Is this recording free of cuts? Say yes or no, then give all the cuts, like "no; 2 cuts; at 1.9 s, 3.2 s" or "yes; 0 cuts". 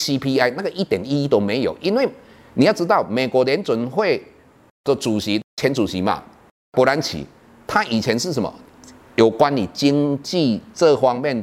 yes; 0 cuts